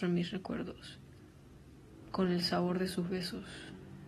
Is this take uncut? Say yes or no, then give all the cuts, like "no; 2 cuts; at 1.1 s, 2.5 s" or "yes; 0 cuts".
yes; 0 cuts